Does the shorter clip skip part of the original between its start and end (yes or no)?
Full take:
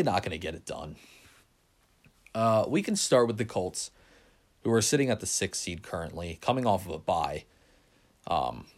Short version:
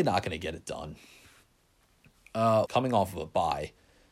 yes